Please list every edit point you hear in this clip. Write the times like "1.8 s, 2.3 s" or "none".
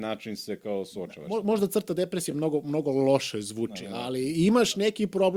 none